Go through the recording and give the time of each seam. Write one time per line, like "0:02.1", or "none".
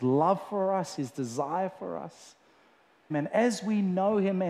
0:01.0
0:03.1